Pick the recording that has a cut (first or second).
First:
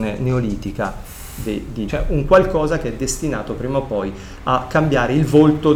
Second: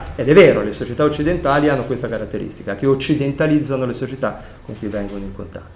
first